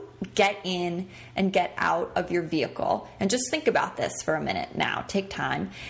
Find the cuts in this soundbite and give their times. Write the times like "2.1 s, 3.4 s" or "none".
none